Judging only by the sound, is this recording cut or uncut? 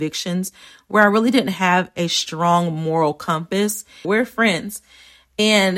cut